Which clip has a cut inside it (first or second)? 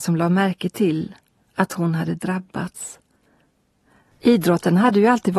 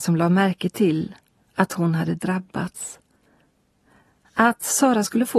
first